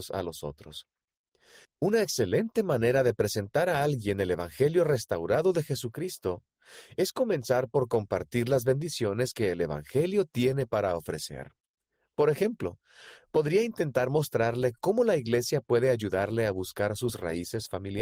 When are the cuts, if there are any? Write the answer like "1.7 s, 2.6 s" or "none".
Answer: none